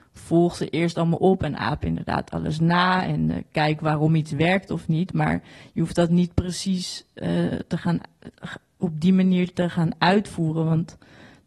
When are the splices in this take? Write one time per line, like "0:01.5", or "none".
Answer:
none